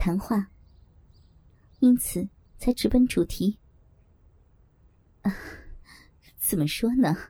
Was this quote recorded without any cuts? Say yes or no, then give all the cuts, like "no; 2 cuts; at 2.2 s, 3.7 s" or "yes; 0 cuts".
yes; 0 cuts